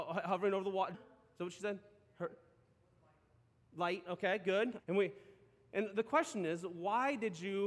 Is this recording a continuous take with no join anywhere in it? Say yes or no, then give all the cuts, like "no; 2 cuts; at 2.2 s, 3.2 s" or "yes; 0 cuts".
no; 2 cuts; at 0.9 s, 4.8 s